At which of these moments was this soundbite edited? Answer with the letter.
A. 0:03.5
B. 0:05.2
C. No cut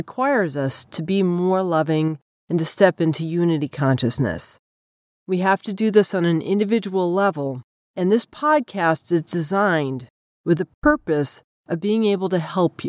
B